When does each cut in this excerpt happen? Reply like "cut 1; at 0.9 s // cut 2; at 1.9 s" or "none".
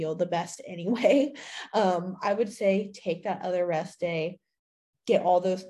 none